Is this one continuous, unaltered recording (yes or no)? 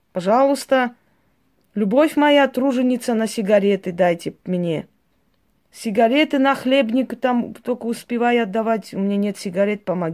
no